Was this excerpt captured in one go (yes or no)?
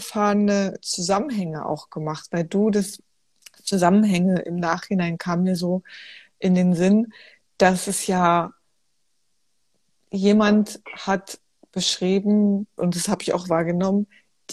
no